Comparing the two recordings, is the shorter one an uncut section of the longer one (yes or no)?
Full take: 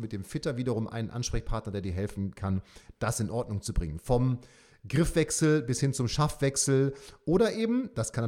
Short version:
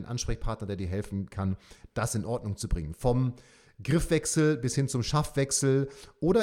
yes